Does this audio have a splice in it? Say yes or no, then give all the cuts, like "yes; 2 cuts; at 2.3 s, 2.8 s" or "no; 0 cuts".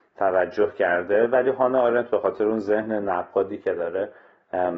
no; 0 cuts